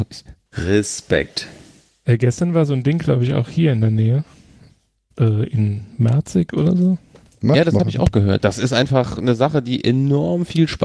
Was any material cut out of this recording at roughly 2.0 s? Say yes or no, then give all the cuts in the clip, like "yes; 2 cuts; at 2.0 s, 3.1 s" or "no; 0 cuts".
no; 1 cut; at 8.4 s